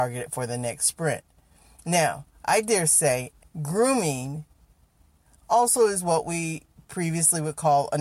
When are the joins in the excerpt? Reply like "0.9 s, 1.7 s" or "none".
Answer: 3.4 s